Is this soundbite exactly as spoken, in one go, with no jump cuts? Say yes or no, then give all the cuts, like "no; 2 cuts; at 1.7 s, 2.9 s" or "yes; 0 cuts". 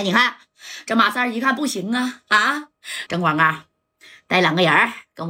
no; 1 cut; at 3.1 s